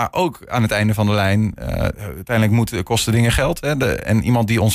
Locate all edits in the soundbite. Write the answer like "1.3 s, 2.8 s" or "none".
1.9 s

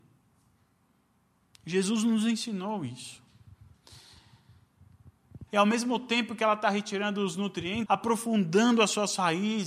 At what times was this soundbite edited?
5.5 s, 7.9 s

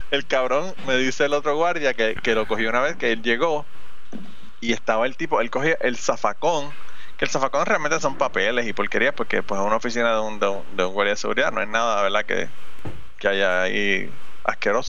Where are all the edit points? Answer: none

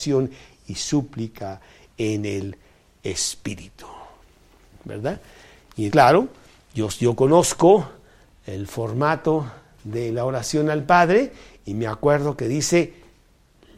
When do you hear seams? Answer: 5.9 s

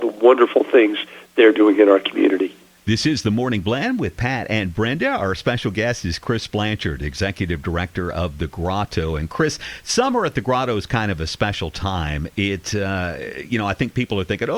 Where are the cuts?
none

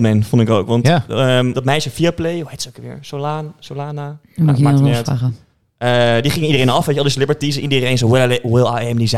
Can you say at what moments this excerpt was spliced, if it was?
1.5 s

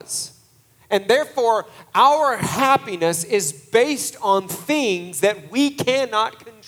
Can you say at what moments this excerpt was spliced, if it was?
none

